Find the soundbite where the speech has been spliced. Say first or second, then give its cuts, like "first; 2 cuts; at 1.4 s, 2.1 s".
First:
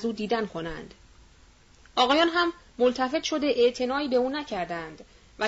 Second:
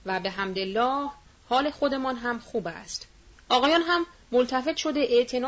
second; 1 cut; at 3.3 s